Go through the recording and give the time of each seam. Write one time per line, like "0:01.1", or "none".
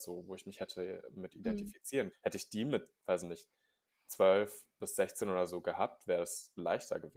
0:02.1